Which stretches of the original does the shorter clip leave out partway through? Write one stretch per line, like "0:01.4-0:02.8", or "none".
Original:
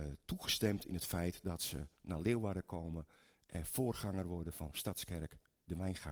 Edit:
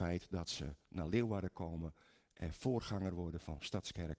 none

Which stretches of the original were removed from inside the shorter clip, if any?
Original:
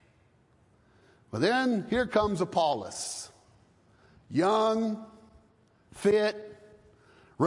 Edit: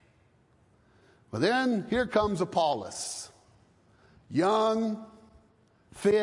none

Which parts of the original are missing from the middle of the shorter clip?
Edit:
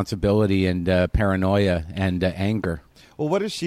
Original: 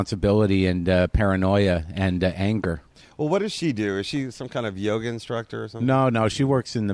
none

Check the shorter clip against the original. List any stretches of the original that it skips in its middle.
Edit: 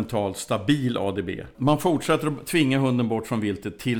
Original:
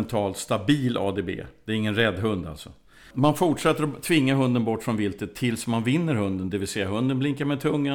0:01.5-0:03.1

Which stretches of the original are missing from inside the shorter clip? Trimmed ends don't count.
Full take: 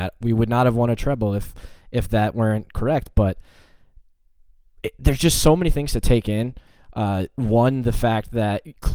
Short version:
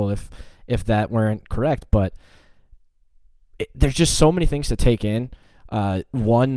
none

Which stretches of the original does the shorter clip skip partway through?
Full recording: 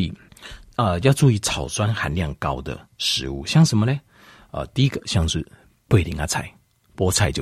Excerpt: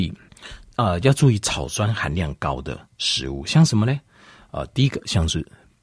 none

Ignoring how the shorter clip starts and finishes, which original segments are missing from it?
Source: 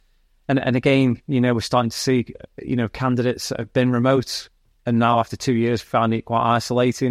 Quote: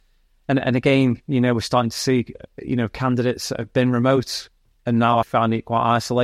0:05.2-0:05.8

